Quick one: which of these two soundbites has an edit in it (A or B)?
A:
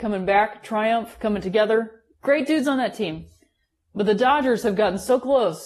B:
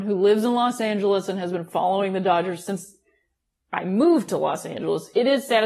A